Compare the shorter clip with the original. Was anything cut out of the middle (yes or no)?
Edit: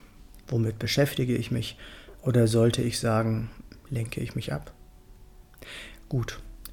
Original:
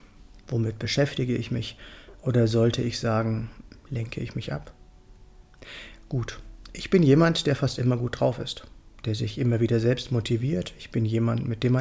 no